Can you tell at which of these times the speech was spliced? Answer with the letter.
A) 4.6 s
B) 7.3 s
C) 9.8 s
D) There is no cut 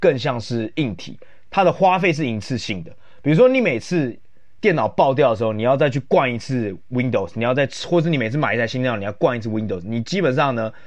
D